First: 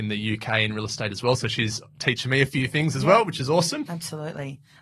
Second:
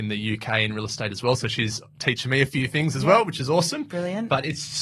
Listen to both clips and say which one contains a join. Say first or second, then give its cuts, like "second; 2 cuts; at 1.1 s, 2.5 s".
first; 1 cut; at 3.9 s